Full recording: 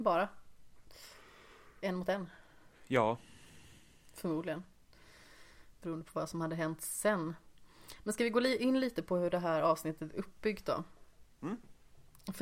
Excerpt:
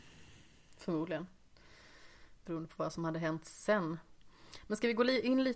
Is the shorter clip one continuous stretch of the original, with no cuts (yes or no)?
yes